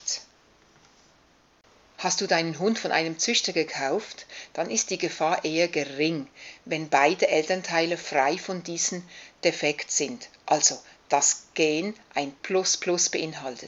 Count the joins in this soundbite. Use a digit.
1